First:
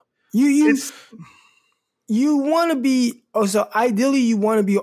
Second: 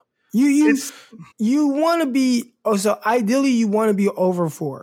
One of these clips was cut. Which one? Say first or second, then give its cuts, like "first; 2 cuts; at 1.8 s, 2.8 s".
second; 1 cut; at 1.3 s